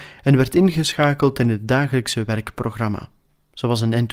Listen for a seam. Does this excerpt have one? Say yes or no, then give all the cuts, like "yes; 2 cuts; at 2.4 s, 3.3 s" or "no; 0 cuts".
no; 0 cuts